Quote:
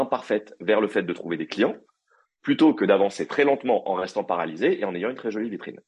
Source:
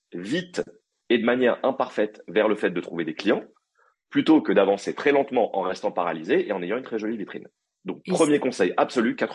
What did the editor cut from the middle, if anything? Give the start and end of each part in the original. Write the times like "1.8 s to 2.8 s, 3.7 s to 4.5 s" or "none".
none